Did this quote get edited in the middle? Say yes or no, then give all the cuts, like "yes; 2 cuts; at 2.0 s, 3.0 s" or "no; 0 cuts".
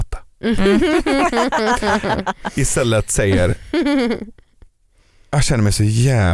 no; 0 cuts